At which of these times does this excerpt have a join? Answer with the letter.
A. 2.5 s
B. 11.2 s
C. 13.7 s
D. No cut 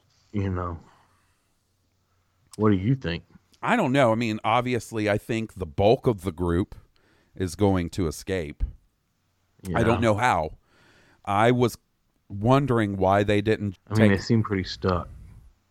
C